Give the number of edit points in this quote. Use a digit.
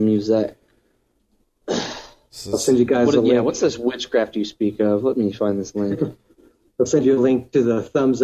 1